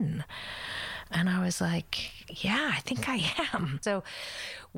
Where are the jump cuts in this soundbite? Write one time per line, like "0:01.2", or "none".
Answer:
0:03.8